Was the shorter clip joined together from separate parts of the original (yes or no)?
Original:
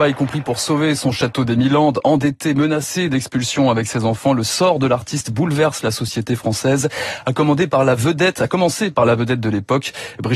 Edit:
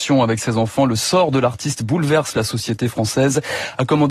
no